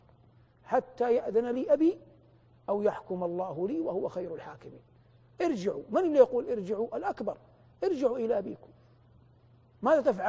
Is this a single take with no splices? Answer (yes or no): yes